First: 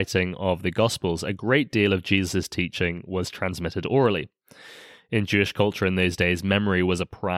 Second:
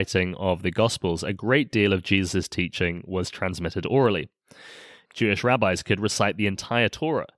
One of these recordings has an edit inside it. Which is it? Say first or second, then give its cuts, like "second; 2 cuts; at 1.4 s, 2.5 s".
second; 1 cut; at 5.0 s